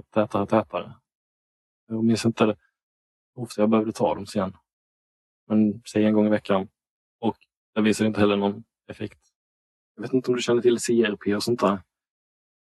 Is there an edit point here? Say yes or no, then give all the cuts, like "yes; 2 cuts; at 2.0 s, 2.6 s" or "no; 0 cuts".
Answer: no; 0 cuts